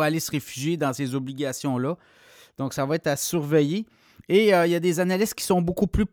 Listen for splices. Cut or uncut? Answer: uncut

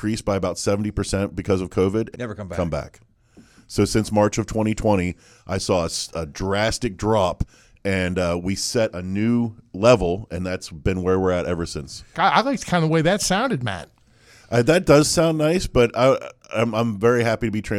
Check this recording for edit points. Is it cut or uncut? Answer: cut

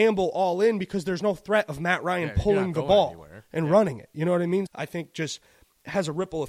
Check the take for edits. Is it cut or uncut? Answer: cut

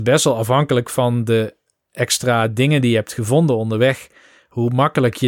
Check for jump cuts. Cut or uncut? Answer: uncut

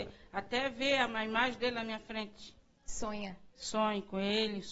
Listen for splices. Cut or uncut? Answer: uncut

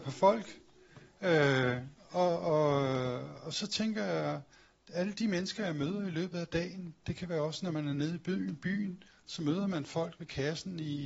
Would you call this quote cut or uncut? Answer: uncut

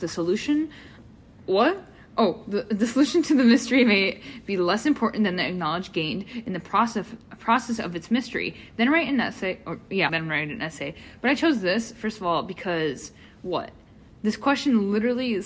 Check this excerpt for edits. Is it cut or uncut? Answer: cut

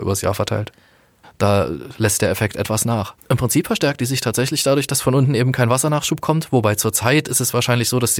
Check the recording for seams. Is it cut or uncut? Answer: cut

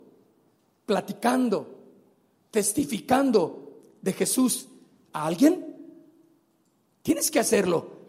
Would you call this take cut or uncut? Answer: uncut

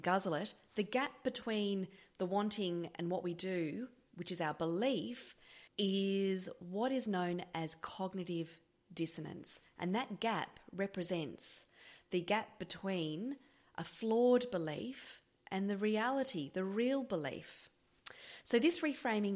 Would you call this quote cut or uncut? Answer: cut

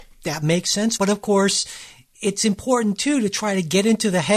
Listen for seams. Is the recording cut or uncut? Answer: cut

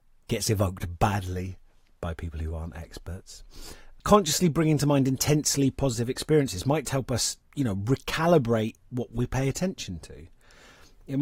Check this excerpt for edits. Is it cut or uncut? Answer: cut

